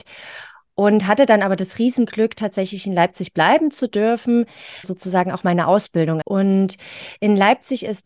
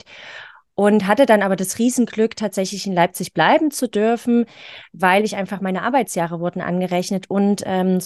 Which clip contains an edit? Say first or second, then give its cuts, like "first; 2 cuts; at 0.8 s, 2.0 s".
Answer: first; 2 cuts; at 4.8 s, 6.2 s